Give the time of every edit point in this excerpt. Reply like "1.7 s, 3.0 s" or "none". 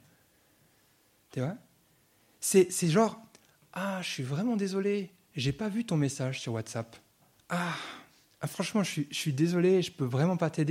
7.3 s